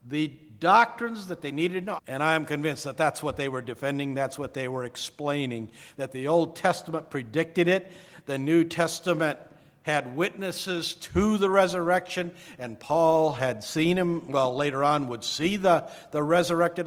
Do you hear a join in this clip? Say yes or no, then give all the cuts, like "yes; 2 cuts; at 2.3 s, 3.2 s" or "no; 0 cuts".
yes; 1 cut; at 2.0 s